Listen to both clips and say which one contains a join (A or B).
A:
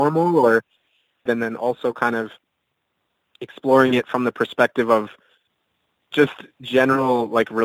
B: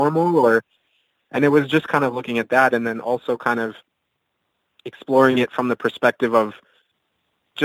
A